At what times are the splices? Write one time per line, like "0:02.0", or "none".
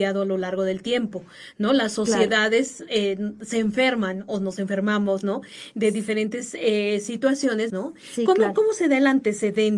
0:07.7